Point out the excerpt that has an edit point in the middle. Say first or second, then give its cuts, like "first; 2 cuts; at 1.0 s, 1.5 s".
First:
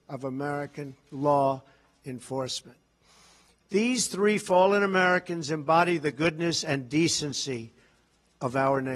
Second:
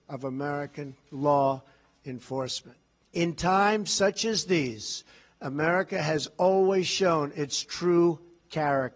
second; 1 cut; at 3.0 s